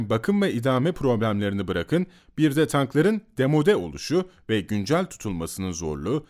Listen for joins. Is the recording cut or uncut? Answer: uncut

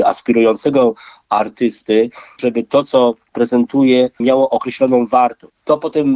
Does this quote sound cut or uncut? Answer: uncut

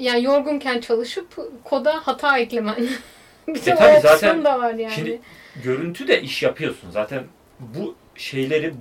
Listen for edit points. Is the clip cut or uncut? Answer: uncut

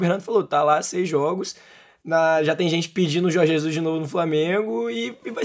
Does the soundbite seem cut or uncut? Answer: uncut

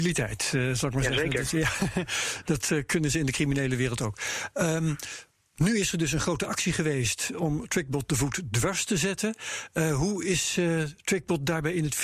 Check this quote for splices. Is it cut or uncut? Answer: uncut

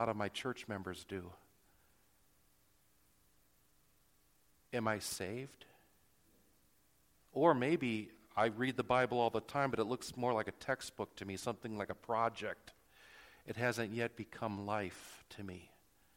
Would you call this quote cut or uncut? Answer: uncut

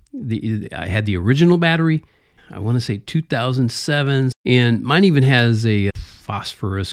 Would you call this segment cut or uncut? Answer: cut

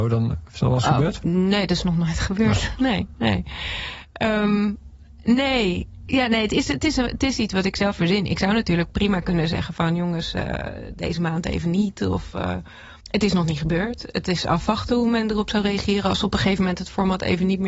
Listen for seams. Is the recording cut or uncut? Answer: cut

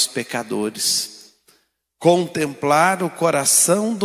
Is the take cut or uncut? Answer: cut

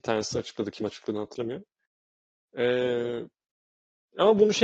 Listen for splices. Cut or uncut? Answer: uncut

